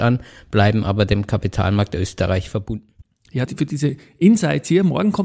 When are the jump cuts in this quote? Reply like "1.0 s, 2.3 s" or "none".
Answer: 3.5 s